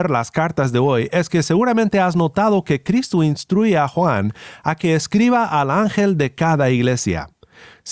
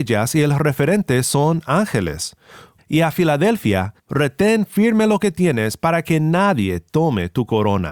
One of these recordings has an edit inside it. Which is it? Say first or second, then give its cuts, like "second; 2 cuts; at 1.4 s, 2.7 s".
second; 2 cuts; at 2.8 s, 4.0 s